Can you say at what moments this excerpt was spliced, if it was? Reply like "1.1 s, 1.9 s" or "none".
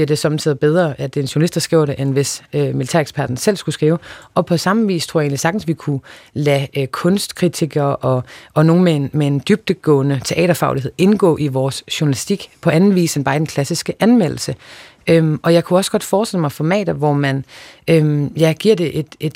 none